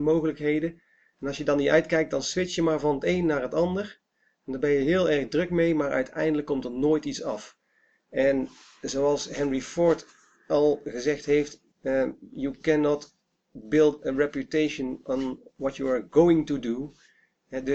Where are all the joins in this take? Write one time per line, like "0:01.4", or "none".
0:11.7